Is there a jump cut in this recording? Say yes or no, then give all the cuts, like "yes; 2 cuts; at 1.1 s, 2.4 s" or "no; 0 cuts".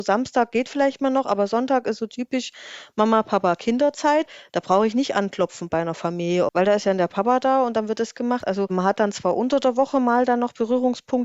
yes; 1 cut; at 6.5 s